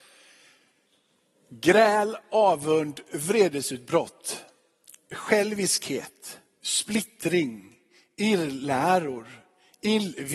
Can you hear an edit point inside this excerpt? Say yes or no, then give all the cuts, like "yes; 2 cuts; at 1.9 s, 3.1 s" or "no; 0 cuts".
no; 0 cuts